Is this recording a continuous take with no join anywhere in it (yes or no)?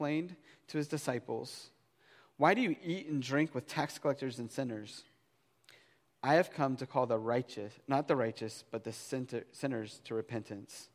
no